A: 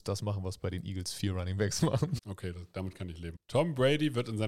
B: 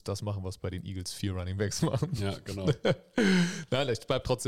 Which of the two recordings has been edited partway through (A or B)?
A